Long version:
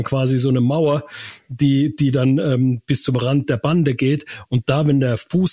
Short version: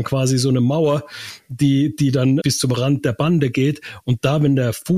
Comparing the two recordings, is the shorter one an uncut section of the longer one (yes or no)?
no